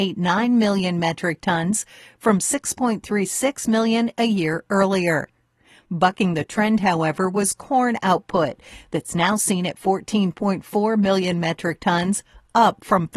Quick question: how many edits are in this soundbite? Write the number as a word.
zero